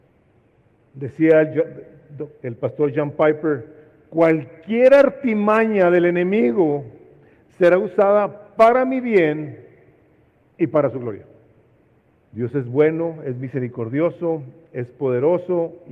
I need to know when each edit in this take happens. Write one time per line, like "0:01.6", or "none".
0:12.2